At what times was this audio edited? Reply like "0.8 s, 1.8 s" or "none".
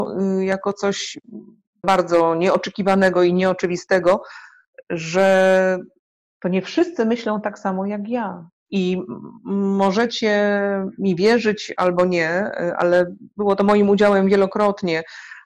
1.8 s, 8.7 s

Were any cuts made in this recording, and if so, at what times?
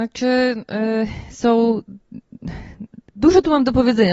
none

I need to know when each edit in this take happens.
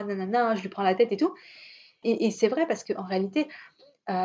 2.0 s

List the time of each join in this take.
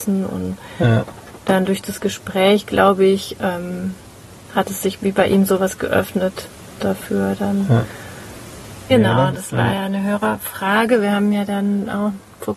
8.9 s

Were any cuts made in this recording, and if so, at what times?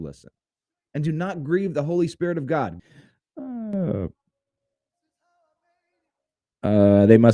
2.8 s

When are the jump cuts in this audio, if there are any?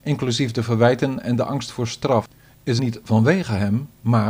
2.8 s

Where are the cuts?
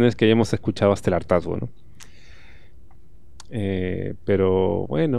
3.5 s

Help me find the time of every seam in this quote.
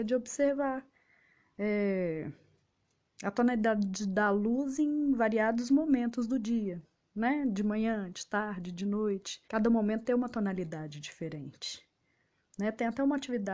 9.4 s

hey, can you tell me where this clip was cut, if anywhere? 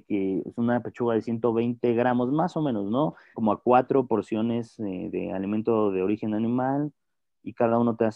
3.3 s

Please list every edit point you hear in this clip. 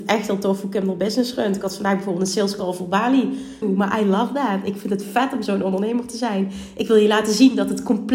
3.6 s

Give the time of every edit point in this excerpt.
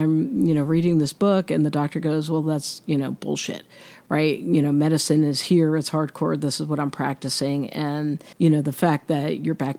8.3 s

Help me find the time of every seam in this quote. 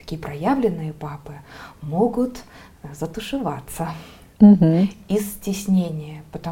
none

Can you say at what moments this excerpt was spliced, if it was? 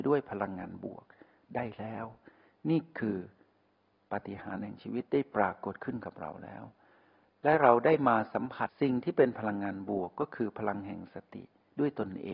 8.7 s

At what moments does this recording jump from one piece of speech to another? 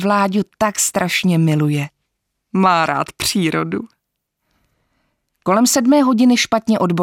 none

